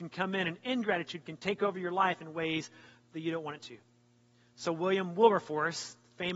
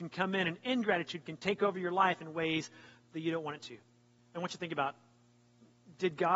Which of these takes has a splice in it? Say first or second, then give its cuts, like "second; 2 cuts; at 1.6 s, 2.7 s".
second; 1 cut; at 4.2 s